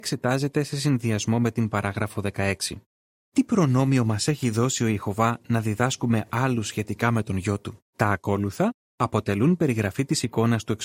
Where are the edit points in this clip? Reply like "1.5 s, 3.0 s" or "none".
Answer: 3.1 s, 7.9 s